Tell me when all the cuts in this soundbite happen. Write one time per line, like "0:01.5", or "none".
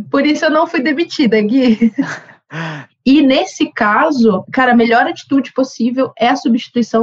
0:02.9